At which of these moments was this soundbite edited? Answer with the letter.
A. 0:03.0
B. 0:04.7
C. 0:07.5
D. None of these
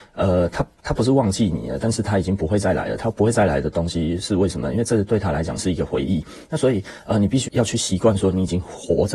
C